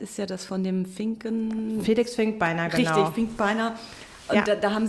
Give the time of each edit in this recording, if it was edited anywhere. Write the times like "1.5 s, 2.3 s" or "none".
none